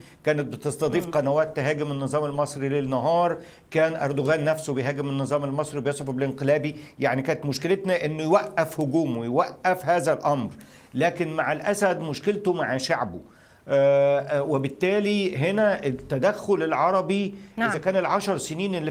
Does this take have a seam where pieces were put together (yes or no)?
no